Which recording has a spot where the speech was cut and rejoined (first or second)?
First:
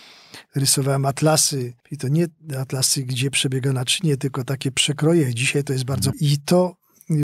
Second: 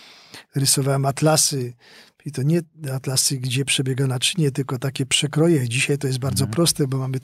first